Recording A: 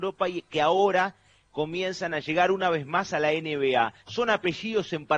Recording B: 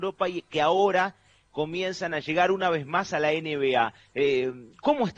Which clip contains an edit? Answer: A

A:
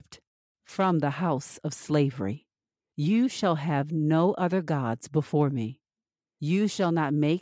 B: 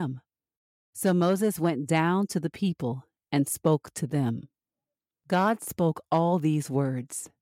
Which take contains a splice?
B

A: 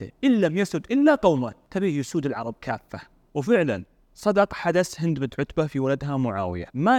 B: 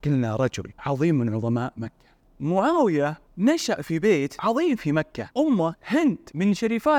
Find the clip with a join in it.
B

